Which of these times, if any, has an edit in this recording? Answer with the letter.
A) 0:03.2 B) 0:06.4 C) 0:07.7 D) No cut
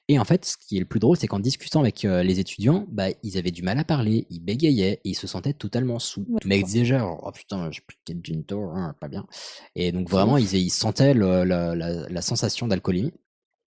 B